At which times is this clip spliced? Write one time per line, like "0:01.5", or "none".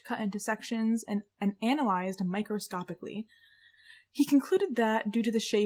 none

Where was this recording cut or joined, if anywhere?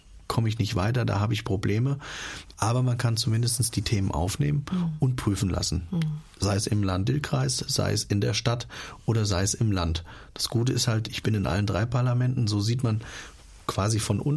0:02.5

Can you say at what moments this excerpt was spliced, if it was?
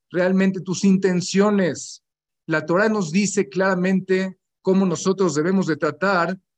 none

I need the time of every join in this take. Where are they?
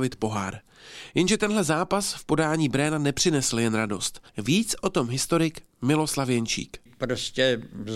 0:04.3

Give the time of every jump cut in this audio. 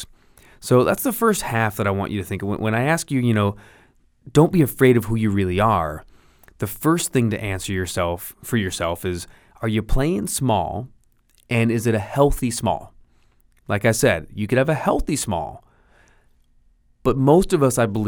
none

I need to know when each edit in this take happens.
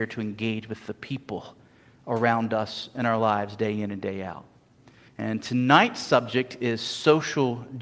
0:05.1

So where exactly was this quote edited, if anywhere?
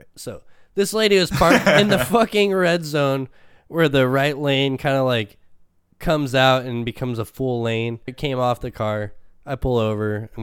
0:08.1

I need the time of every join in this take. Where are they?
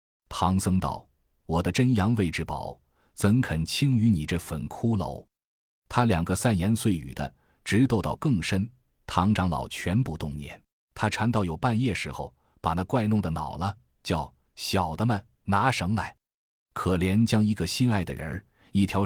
0:10.7

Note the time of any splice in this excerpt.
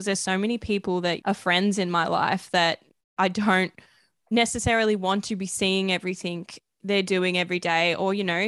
0:01.2

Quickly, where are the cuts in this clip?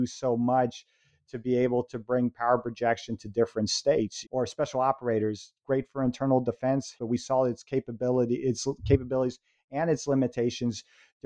0:04.2
0:07.0

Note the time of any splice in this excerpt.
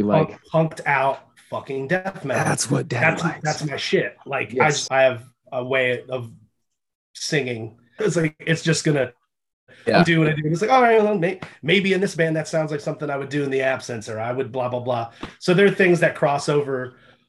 0:04.9
0:08.0

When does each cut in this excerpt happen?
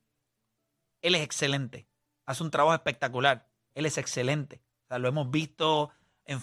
0:03.7

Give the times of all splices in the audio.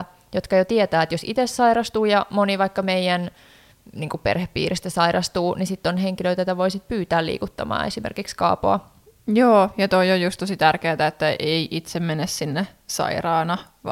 none

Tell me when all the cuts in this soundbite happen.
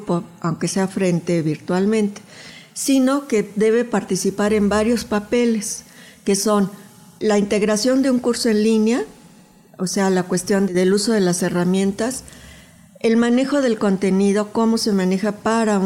none

